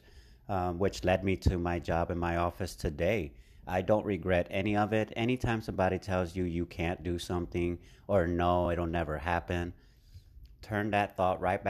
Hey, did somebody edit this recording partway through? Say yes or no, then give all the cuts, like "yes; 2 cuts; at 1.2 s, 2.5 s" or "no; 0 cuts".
no; 0 cuts